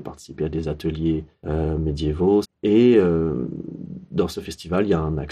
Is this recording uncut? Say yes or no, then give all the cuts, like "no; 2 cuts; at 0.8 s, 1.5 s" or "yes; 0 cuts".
no; 1 cut; at 2.4 s